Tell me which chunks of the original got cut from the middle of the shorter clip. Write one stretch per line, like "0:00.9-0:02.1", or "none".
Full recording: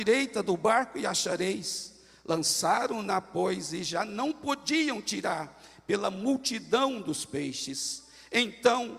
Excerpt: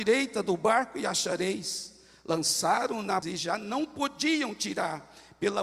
0:03.2-0:03.7